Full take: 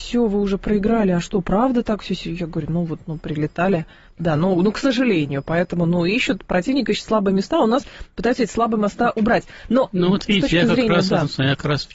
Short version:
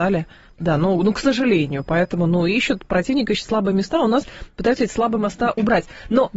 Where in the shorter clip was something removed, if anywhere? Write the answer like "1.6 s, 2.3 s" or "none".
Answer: none